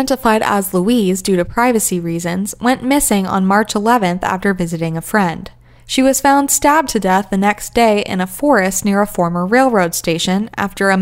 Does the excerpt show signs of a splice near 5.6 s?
no; 0 cuts

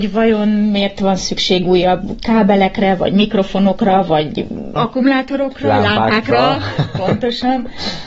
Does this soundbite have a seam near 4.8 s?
yes; 1 cut; at 4.8 s

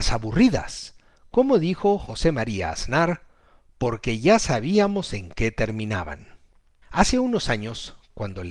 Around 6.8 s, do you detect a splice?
yes; 1 cut; at 6.8 s

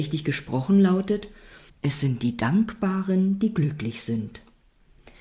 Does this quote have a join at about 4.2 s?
no; 1 cut; at 1.7 s

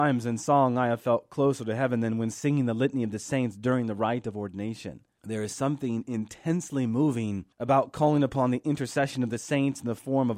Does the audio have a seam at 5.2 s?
yes; 2 cuts; at 5.2 s, 7.5 s

